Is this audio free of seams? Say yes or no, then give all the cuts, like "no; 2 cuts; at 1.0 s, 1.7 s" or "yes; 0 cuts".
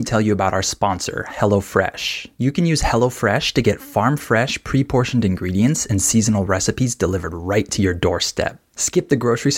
yes; 0 cuts